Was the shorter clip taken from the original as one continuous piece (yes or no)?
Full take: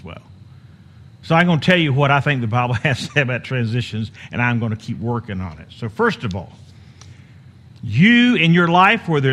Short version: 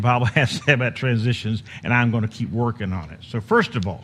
yes